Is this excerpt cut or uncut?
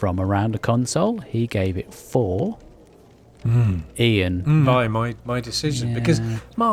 cut